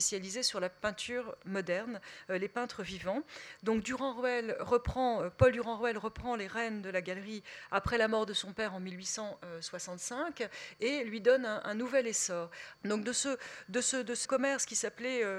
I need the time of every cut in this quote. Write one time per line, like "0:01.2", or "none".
0:12.7
0:14.2